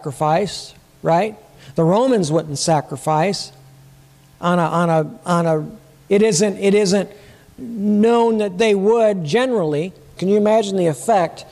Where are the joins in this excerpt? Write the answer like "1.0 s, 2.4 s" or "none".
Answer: 6.1 s, 10.2 s